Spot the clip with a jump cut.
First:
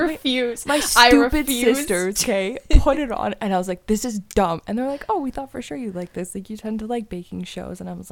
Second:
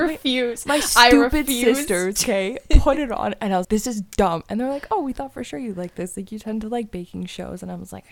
second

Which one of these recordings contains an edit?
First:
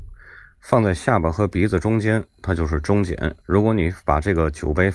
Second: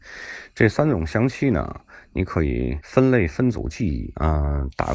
first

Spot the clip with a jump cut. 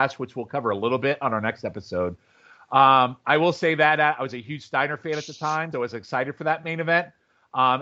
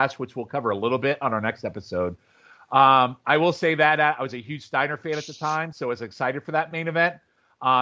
first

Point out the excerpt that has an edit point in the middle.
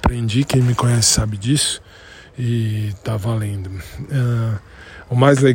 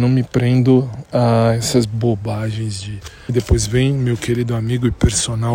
second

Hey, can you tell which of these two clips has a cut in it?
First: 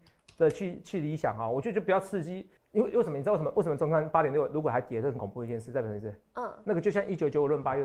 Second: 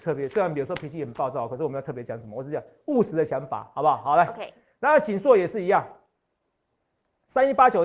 first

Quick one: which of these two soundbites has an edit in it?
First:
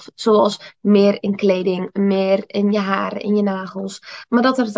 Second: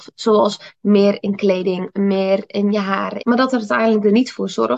second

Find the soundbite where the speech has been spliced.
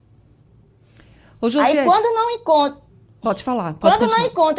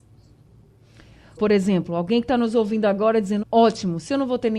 second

